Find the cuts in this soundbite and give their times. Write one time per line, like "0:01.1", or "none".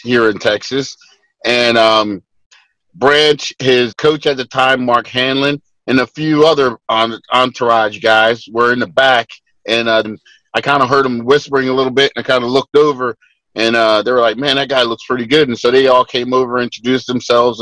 0:03.9
0:10.0